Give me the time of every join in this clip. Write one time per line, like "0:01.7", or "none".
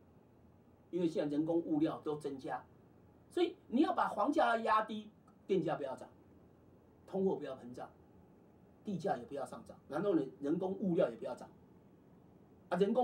0:02.0
0:09.8